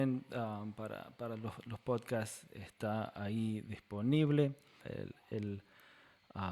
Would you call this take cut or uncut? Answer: cut